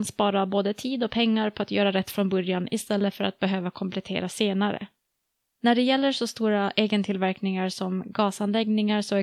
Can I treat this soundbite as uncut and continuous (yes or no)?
no